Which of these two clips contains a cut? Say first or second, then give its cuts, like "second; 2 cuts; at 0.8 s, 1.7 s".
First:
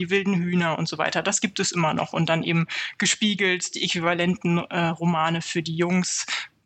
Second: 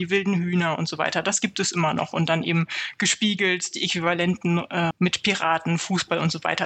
second; 1 cut; at 4.9 s